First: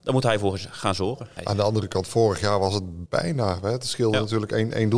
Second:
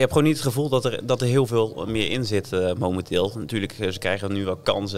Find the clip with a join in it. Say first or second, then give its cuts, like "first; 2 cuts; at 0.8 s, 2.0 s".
first; 2 cuts; at 1.4 s, 3.1 s